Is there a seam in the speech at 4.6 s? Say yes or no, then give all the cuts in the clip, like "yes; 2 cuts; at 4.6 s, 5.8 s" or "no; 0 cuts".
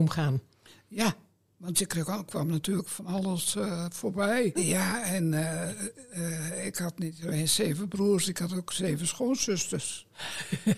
yes; 1 cut; at 4.6 s